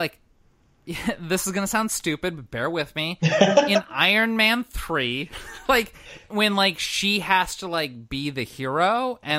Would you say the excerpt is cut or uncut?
uncut